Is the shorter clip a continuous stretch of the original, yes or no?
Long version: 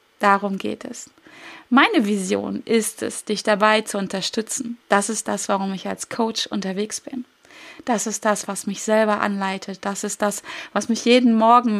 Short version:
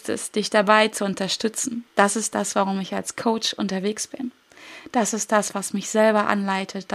yes